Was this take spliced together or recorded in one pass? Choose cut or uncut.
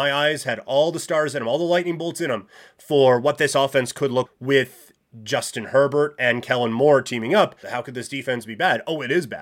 cut